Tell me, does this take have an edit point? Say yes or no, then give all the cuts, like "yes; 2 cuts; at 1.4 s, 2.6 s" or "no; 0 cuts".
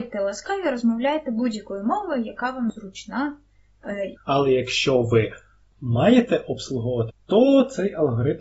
yes; 2 cuts; at 4.2 s, 7.1 s